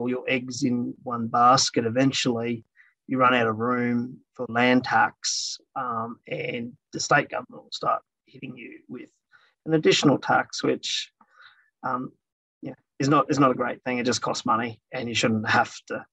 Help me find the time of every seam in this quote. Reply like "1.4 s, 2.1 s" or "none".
none